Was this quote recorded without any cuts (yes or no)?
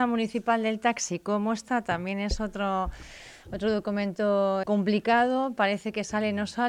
no